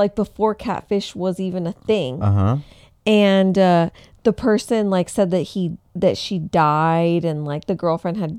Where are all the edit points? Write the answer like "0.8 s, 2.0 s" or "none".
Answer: none